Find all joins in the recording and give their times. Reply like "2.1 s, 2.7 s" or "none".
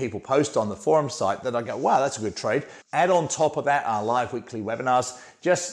2.8 s

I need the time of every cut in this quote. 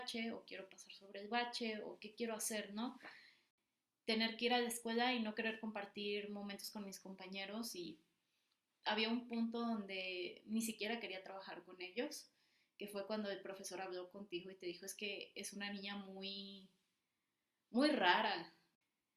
none

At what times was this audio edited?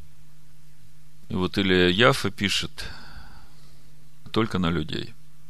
1.2 s, 4.3 s

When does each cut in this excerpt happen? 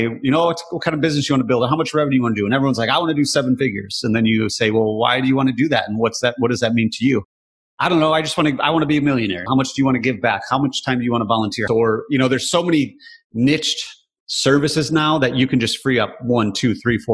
9.5 s, 11.7 s

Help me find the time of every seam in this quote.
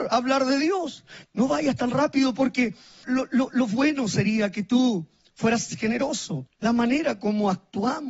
1.2 s, 3.0 s, 6.5 s

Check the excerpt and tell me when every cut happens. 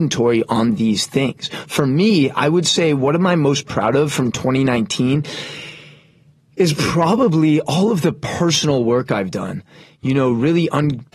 none

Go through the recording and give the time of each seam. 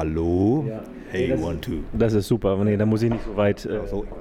none

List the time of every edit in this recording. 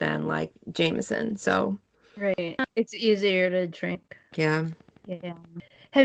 4.3 s

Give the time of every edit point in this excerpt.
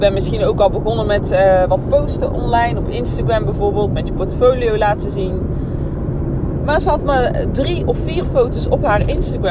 6.6 s

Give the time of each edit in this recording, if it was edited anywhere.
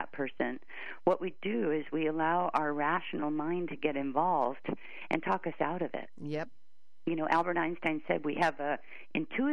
none

